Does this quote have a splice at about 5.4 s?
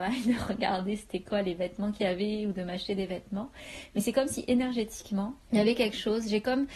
yes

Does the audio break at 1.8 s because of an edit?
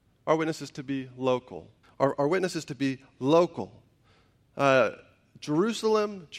yes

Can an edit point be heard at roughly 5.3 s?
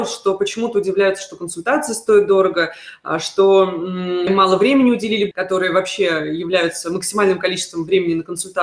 yes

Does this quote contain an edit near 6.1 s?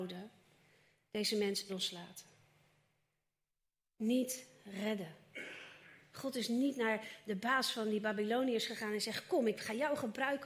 yes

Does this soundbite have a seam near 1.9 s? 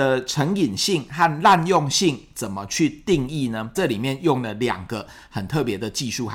no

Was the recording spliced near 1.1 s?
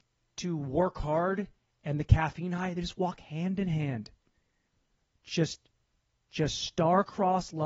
no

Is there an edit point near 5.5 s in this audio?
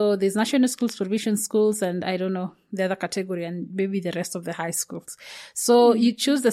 no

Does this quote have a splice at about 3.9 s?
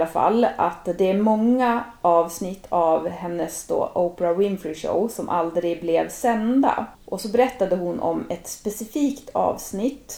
no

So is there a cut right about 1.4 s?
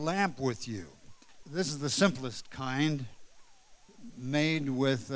yes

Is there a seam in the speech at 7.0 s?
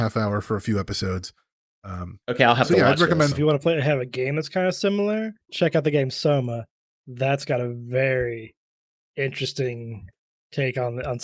no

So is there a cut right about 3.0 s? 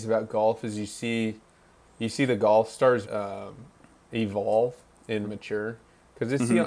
yes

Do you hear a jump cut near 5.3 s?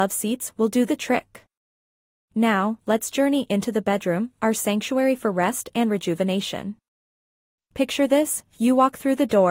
no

